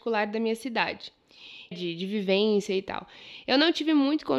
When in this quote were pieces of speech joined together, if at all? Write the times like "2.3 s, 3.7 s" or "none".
1.7 s